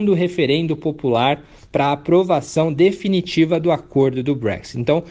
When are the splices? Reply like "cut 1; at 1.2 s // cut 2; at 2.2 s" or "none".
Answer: none